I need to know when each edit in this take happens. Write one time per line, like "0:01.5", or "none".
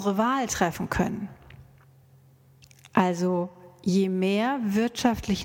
none